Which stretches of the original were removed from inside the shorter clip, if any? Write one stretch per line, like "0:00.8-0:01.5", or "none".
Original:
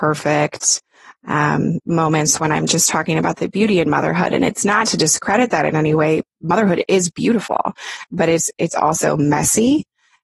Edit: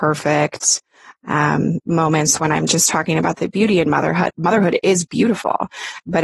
0:04.3-0:06.3